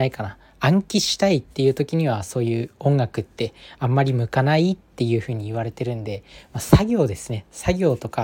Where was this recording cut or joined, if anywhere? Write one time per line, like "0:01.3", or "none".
none